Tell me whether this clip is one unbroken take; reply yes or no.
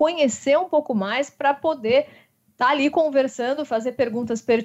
yes